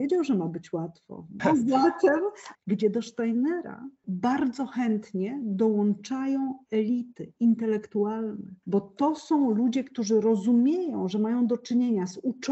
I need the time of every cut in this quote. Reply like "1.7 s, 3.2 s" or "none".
1.4 s, 2.5 s, 8.6 s